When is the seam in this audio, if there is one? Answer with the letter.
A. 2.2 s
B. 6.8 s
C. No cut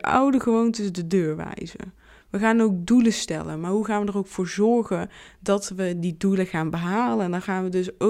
C